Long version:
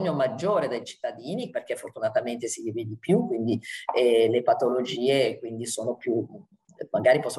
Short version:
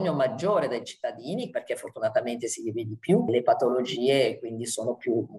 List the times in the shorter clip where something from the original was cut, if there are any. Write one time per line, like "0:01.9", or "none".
0:03.3